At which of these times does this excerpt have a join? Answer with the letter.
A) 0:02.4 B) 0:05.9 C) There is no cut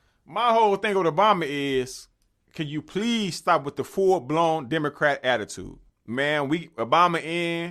B